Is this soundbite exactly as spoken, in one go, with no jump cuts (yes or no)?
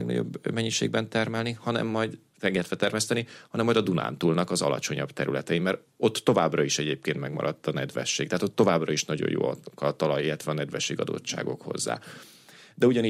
yes